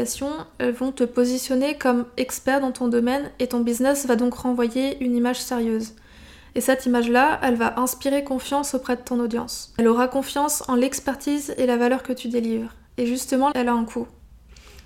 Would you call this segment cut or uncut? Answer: cut